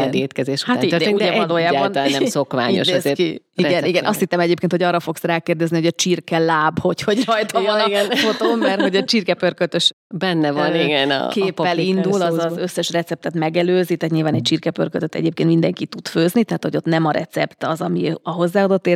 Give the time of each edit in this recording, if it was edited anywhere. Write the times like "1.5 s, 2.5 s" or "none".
none